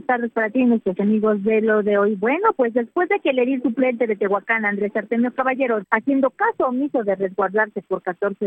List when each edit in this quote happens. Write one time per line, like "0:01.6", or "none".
0:05.8